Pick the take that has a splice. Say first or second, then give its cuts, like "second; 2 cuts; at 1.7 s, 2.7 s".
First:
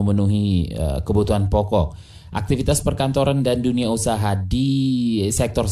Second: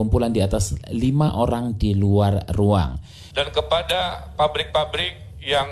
second; 1 cut; at 3.3 s